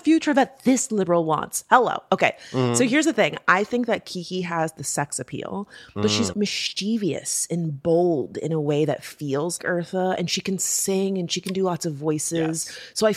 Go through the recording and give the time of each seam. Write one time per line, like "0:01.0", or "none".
0:06.3
0:09.6